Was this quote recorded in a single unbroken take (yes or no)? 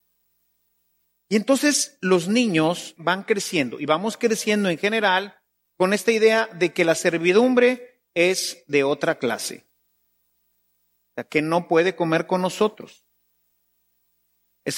yes